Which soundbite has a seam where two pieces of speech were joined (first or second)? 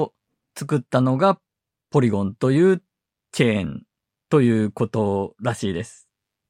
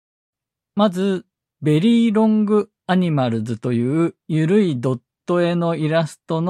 second